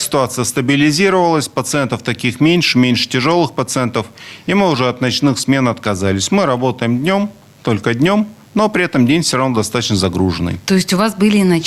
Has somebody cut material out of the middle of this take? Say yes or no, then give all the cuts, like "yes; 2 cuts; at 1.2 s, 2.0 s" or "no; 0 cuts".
no; 0 cuts